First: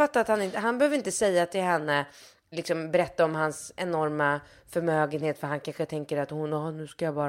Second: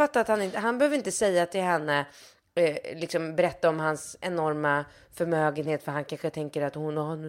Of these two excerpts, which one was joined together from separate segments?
first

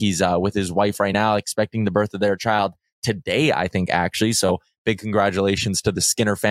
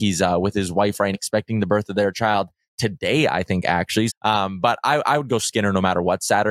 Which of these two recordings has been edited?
second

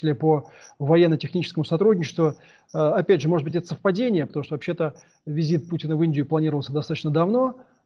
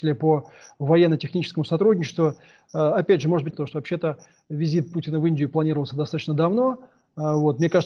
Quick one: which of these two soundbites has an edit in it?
second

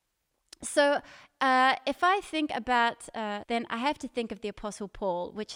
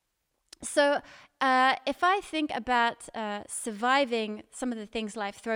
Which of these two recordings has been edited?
first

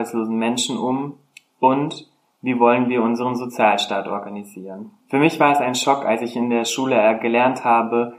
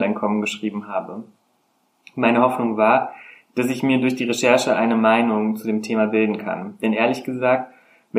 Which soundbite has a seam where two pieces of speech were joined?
first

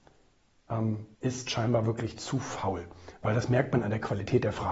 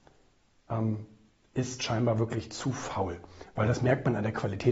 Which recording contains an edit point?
first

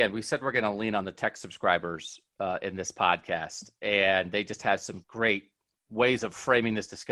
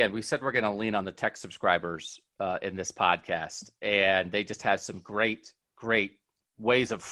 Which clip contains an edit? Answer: first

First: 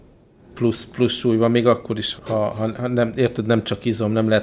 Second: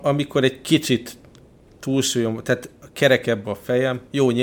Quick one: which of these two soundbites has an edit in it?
first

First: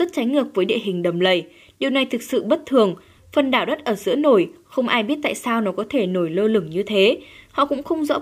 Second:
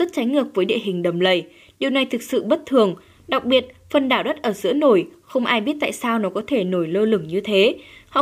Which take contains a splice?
first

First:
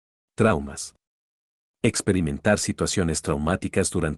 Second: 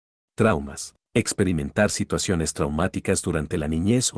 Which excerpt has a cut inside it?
second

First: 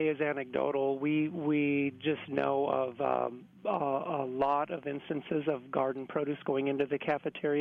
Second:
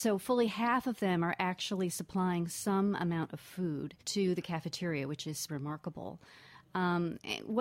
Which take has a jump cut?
second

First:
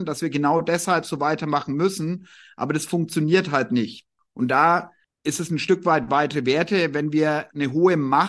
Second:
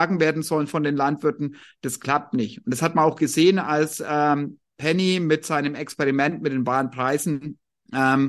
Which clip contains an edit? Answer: first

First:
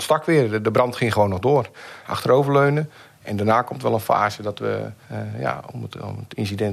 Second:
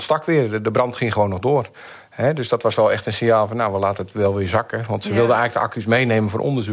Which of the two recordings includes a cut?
first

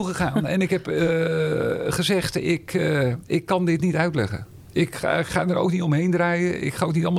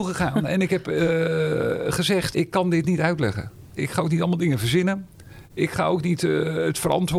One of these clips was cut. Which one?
second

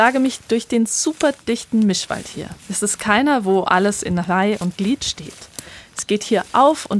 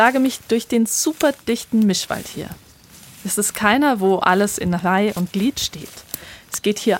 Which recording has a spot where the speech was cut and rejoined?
first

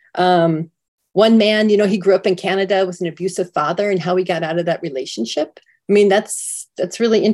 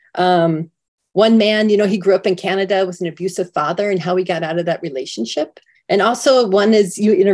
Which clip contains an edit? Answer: second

